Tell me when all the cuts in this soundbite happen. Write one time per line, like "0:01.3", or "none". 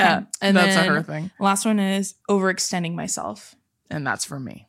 0:02.2